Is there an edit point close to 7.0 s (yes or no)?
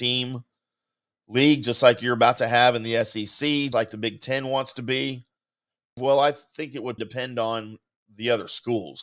yes